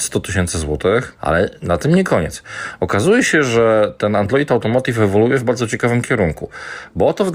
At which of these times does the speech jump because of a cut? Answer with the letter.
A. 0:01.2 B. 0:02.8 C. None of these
A